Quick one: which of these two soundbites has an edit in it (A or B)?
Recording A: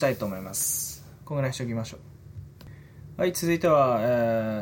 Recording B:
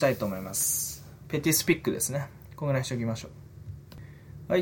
A